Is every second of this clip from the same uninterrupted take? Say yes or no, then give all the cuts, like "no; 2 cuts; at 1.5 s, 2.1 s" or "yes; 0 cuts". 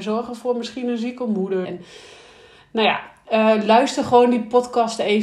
no; 1 cut; at 1.6 s